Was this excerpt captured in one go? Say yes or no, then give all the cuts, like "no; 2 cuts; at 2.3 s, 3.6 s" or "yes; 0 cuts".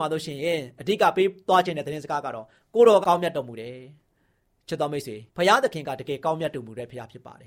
no; 2 cuts; at 3.0 s, 5.3 s